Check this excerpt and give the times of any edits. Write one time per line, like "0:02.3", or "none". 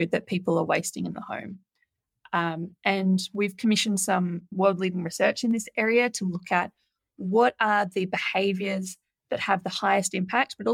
none

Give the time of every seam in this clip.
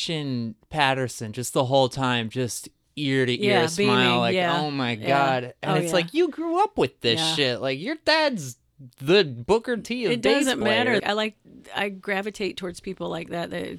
0:11.0

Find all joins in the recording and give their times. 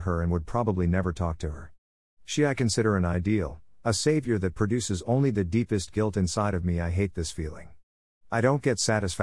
none

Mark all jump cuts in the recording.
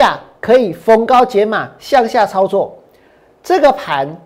none

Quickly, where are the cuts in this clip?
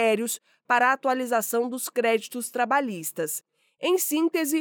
none

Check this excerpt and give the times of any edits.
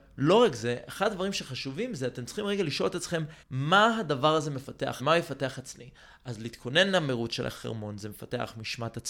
0:03.4
0:05.0

